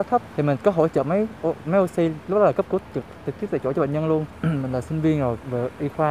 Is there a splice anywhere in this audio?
no; 0 cuts

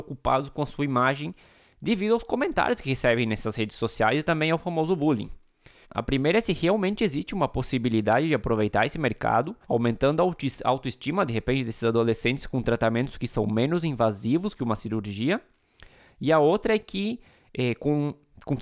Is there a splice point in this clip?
yes; 2 cuts; at 5.8 s, 9.6 s

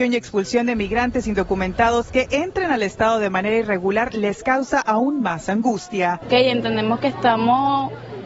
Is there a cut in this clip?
yes; 1 cut; at 6.2 s

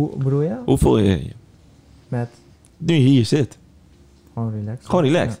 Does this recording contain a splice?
no; 0 cuts

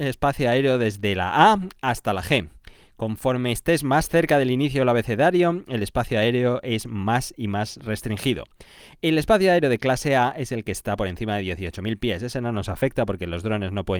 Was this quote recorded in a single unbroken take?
yes; 0 cuts

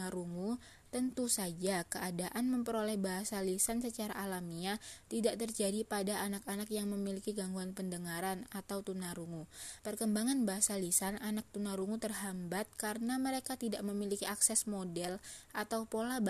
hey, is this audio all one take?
no; 1 cut; at 9.8 s

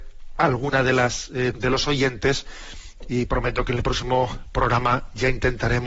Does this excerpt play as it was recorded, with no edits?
no; 1 cut; at 1.5 s

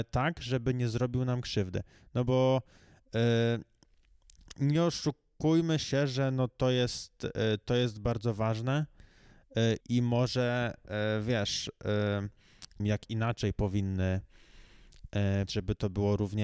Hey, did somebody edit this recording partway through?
yes; 3 cuts; at 9.8 s, 12.8 s, 15.5 s

